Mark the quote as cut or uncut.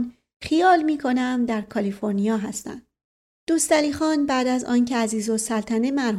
uncut